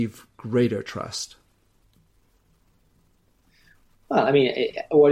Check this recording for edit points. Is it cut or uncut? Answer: uncut